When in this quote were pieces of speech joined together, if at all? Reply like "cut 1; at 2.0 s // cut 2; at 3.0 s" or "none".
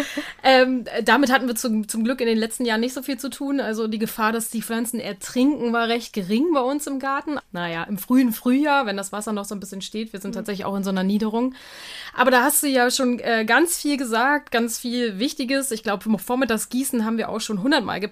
cut 1; at 7.4 s